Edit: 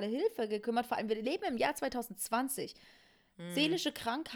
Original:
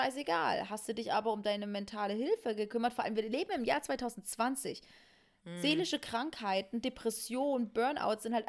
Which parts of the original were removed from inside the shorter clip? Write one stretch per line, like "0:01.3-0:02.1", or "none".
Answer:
none